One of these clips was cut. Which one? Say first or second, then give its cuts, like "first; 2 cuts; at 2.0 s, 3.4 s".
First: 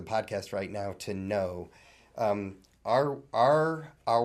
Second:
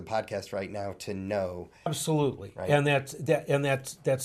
second; 1 cut; at 1.9 s